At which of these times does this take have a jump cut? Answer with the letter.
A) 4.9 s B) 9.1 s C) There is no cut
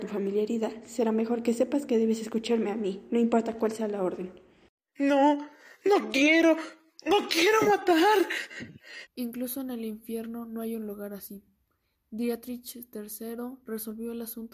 B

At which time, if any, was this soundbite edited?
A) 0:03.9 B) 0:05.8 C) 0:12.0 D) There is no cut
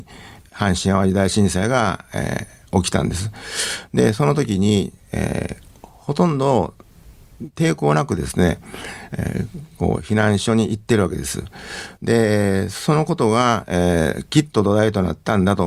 C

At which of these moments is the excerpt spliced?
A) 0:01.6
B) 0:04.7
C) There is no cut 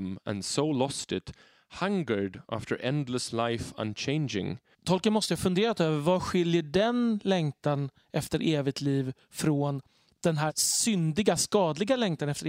B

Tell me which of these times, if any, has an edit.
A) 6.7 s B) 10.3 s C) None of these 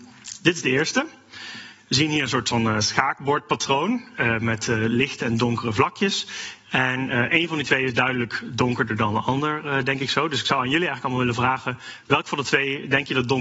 A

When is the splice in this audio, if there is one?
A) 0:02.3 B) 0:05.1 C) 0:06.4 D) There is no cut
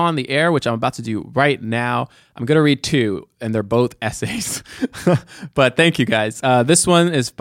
D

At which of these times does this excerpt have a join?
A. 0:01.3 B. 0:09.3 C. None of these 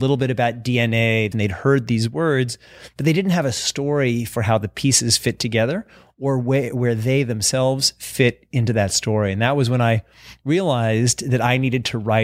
A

